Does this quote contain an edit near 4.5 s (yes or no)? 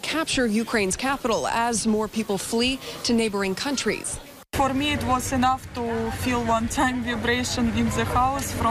no